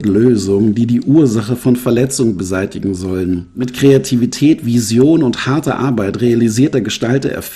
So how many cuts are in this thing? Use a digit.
0